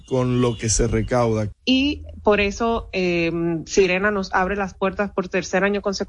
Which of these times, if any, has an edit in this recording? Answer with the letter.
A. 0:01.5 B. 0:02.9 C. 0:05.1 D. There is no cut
A